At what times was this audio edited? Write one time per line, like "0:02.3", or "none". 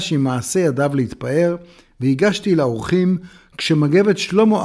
none